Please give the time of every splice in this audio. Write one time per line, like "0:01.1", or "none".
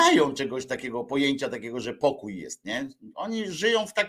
none